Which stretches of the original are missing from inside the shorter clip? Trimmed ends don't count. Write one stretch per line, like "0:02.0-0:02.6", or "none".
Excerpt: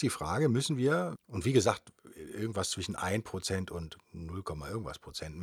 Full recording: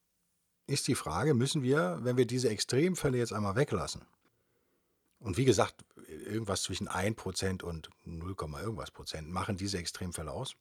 0:02.0-0:05.1